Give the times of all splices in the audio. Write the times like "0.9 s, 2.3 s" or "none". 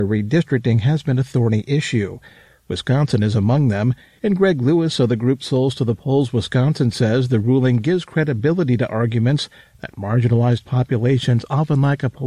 none

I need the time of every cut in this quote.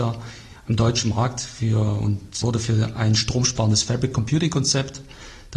2.4 s

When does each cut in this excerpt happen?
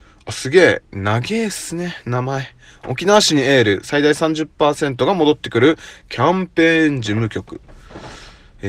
none

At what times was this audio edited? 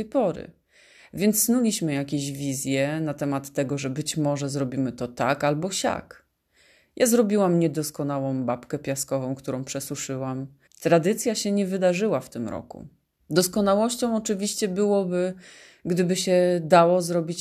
10.7 s, 13.2 s

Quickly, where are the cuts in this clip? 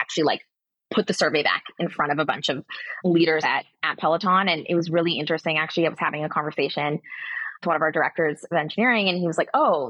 none

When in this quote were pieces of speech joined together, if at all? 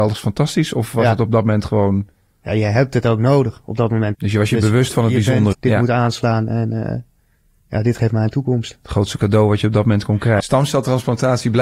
4.1 s, 5.5 s, 10.4 s

